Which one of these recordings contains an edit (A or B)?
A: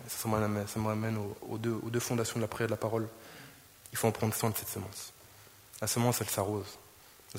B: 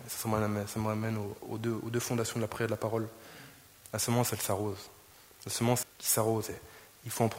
B